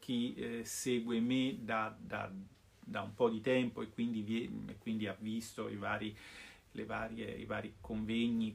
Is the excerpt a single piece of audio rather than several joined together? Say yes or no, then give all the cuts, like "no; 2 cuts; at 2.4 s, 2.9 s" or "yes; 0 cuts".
yes; 0 cuts